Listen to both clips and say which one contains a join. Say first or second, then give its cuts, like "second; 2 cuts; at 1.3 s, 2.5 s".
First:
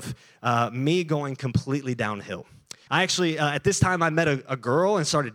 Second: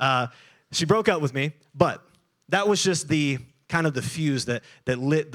first; 1 cut; at 2.9 s